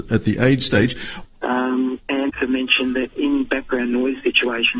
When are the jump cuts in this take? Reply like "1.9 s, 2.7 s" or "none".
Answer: 1.2 s, 2.3 s